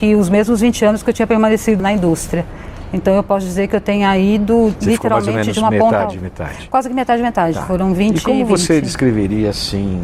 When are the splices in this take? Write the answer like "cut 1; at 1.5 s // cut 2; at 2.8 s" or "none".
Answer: cut 1; at 1.8 s